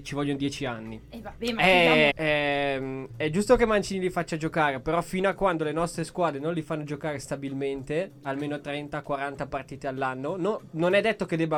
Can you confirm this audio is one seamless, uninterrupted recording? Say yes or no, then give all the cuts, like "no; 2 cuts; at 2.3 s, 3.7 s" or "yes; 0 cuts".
no; 1 cut; at 2.1 s